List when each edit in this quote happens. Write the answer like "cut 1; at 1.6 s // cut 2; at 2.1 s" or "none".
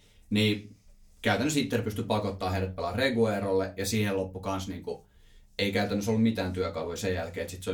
none

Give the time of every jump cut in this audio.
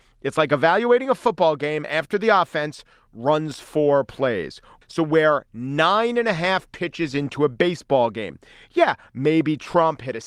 cut 1; at 4.8 s

